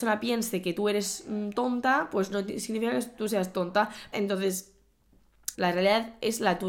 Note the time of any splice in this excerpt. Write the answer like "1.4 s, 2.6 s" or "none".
4.1 s, 5.5 s